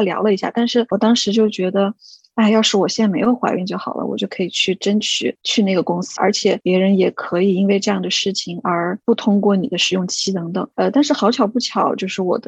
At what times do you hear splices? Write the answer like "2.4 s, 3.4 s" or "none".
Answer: 6.2 s, 10.7 s